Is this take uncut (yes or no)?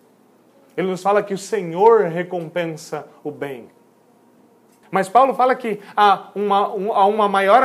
no